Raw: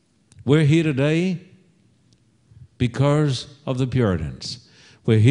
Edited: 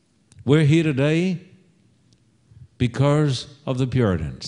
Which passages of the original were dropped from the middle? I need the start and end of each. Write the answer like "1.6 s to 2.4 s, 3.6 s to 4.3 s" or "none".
none